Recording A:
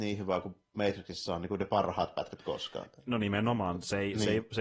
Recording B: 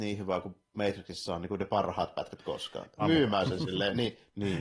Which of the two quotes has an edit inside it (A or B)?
B